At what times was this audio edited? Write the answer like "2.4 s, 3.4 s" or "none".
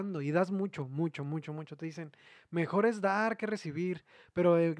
none